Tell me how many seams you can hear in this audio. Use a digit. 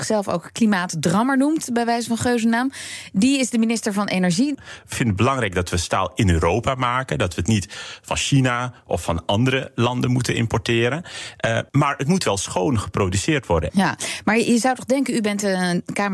3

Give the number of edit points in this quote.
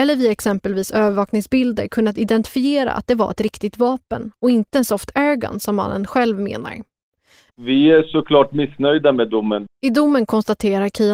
2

